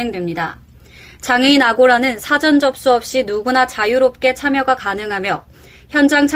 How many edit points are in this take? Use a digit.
0